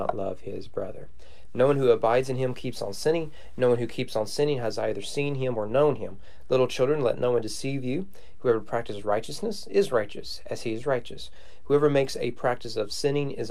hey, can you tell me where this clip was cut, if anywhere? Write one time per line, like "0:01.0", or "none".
0:01.4